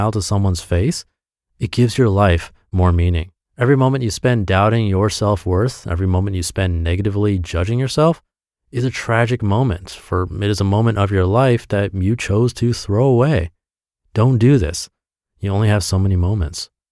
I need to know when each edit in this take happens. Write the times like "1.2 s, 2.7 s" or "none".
3.4 s